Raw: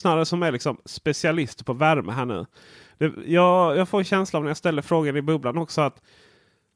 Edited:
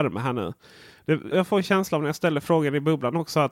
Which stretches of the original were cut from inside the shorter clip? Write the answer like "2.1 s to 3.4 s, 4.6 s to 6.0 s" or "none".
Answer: 3.2 s to 3.7 s